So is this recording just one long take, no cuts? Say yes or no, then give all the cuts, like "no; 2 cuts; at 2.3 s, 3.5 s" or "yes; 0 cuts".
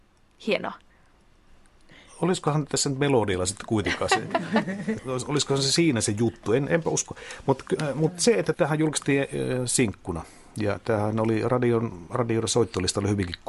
no; 1 cut; at 4.1 s